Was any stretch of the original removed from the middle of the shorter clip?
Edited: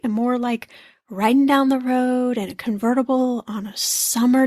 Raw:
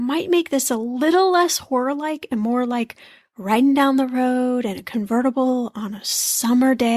no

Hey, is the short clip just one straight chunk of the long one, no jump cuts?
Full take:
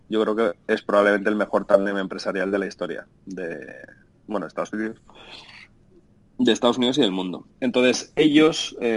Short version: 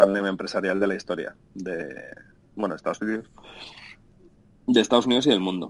yes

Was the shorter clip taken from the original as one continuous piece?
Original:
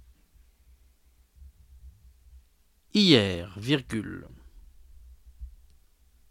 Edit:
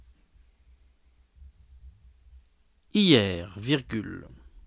yes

